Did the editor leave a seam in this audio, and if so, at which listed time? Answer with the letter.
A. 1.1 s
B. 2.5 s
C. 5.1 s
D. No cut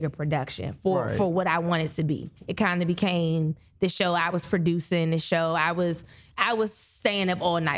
B